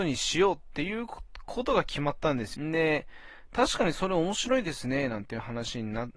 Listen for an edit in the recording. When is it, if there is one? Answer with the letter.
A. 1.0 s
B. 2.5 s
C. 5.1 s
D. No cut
B